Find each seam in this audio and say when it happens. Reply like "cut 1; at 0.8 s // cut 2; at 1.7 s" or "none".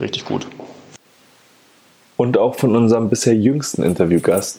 none